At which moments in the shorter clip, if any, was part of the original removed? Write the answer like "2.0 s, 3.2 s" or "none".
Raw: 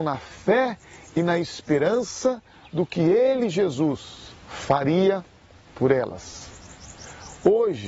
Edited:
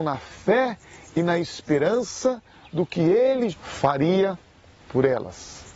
3.5 s